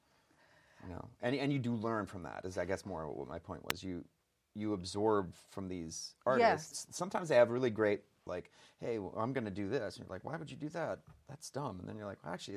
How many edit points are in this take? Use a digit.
2